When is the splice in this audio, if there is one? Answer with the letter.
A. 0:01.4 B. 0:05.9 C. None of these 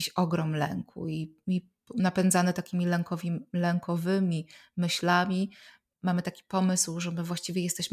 B